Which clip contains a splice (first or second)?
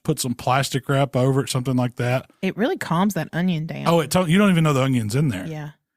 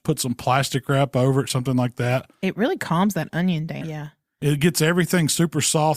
second